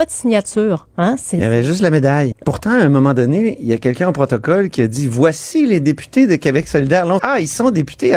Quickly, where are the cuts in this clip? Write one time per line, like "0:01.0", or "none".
0:02.3
0:07.2